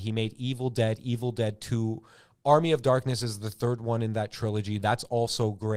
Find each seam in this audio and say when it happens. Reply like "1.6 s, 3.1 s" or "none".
none